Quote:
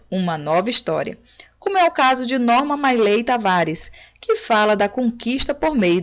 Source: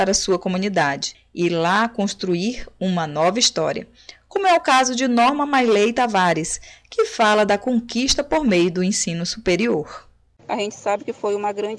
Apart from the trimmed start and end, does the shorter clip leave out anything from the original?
no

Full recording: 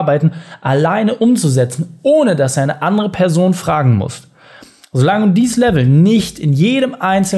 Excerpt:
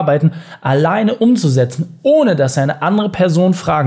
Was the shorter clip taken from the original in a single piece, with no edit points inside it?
yes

